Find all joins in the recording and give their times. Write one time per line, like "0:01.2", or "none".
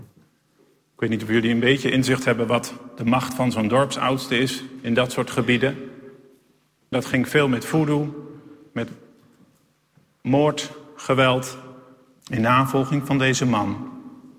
0:06.9
0:12.2